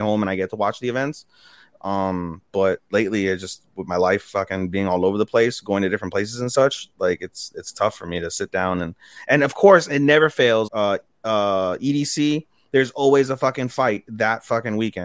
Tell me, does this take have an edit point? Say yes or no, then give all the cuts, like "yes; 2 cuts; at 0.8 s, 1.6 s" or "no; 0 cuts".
yes; 1 cut; at 10.7 s